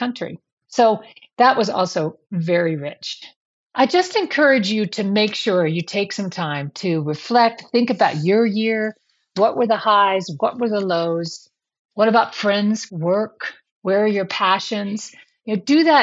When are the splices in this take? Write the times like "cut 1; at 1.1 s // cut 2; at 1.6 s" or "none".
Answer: cut 1; at 12.9 s